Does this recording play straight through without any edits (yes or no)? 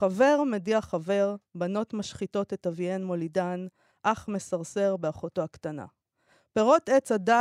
yes